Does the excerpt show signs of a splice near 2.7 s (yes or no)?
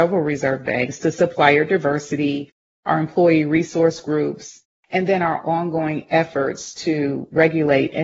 no